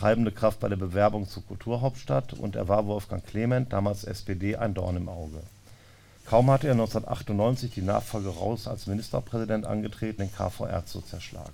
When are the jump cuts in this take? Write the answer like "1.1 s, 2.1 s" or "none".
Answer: 6.2 s, 10.2 s